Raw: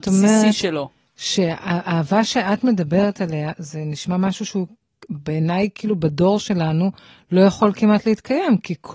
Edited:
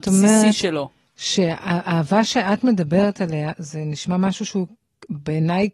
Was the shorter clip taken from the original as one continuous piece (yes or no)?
yes